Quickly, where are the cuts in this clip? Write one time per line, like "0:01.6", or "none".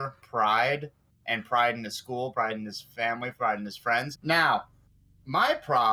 0:02.3
0:04.1